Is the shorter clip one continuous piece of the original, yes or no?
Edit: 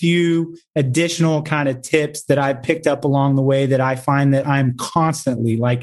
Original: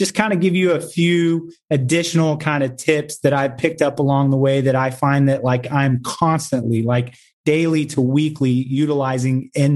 no